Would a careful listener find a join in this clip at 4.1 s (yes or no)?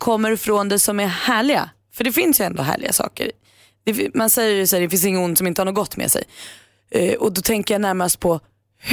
no